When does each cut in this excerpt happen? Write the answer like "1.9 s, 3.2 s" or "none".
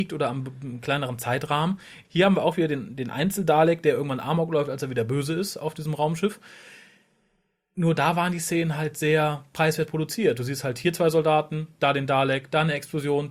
2.0 s